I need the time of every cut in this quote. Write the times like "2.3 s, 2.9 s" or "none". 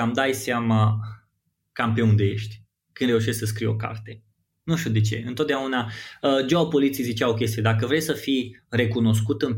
none